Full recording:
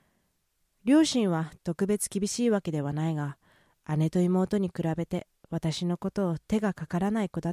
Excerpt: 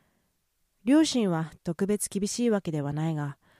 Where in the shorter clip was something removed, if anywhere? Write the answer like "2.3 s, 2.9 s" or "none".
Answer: none